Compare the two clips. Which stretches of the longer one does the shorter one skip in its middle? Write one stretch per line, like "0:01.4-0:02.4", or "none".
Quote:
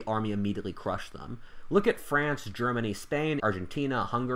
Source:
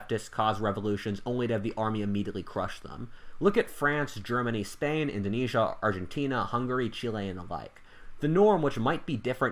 0:05.1-0:05.8

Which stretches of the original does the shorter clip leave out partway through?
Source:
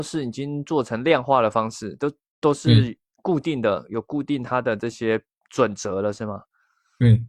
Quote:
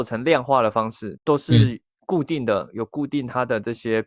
0:02.0-0:02.3

